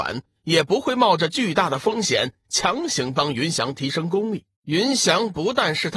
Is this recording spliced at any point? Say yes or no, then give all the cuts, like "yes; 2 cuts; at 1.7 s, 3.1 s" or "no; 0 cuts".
yes; 1 cut; at 4.5 s